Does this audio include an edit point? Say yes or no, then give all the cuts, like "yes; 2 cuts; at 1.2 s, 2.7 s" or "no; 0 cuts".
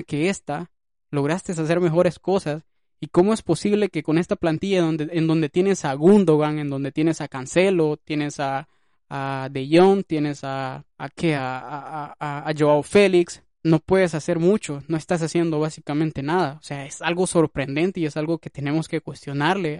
no; 0 cuts